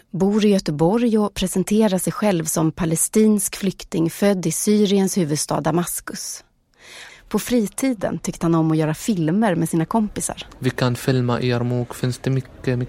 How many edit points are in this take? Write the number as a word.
two